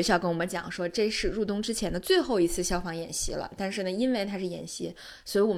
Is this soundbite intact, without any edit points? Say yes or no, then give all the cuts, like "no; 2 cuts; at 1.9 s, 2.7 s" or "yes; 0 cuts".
yes; 0 cuts